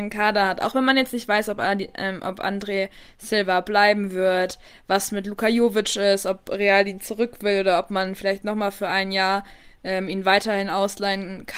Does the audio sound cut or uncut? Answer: uncut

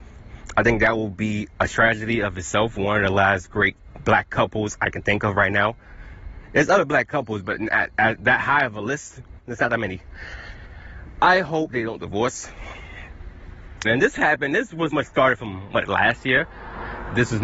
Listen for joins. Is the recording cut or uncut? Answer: cut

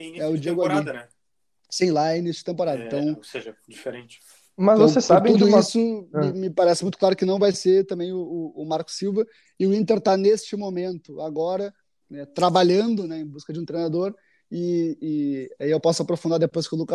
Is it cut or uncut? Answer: uncut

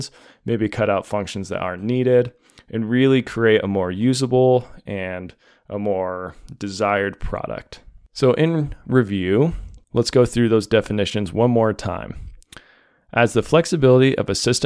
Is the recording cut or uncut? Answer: uncut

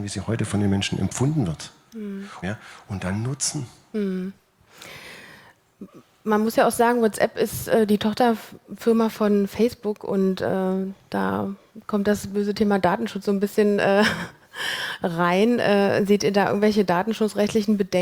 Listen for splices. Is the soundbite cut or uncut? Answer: cut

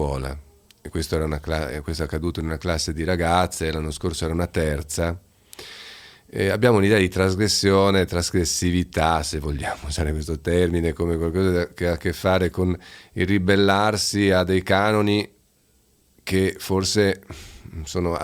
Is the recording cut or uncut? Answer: uncut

